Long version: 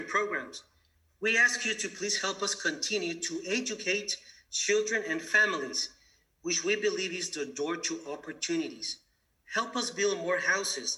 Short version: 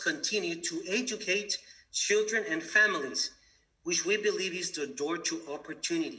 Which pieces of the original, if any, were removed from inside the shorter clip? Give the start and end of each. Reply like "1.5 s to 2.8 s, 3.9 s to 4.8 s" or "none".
none